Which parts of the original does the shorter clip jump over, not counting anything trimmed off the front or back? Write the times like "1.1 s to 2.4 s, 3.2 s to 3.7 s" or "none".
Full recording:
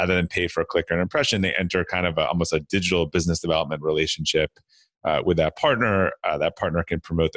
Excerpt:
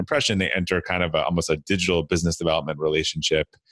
none

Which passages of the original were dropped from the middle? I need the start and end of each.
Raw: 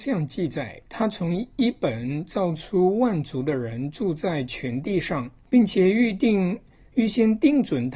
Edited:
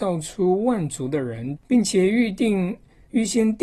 3.9 s to 5.4 s

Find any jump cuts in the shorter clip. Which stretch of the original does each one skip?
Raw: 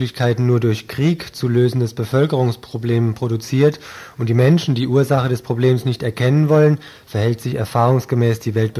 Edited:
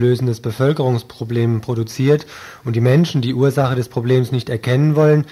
none

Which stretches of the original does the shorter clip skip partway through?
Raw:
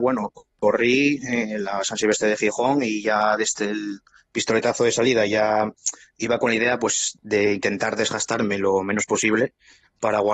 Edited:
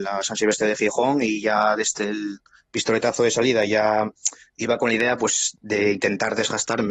none

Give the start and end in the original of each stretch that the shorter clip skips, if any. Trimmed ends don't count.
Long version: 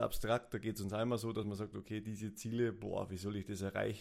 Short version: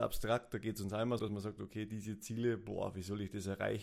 1.2 s to 1.3 s

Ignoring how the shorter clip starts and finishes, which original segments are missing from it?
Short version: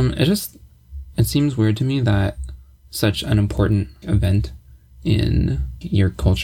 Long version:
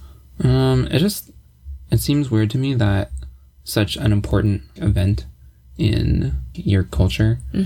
none

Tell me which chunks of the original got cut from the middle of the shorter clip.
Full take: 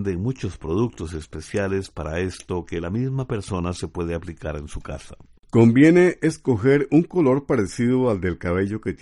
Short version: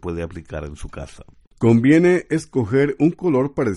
none

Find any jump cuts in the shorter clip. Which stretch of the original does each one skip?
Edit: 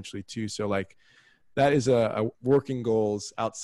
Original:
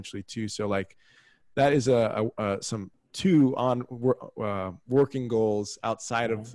2.3 s to 4.8 s

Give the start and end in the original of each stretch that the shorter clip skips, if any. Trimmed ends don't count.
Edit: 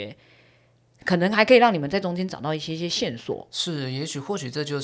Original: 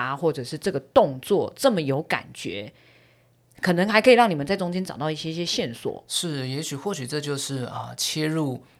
none

